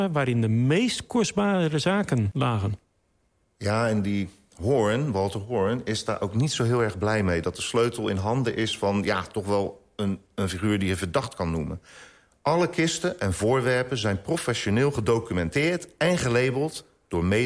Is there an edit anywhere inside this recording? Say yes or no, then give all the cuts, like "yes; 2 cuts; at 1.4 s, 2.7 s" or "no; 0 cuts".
no; 0 cuts